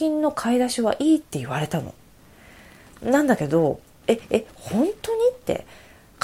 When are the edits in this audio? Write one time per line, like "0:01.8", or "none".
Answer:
none